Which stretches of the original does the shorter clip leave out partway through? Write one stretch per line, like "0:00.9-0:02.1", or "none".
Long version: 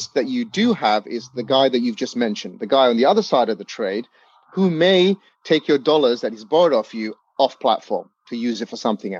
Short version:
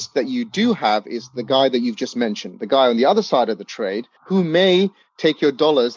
0:04.2-0:04.4